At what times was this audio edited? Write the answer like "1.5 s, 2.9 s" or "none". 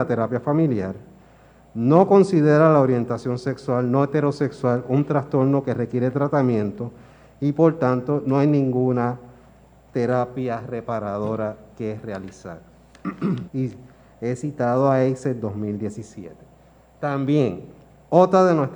13.5 s